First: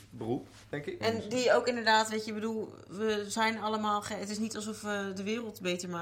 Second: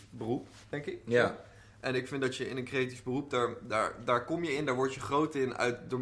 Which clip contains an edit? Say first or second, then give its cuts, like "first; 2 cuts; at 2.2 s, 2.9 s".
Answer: first; 1 cut; at 1.0 s